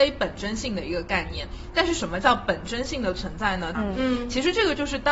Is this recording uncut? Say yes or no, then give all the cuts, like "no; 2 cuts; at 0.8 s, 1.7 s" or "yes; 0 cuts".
no; 1 cut; at 3.7 s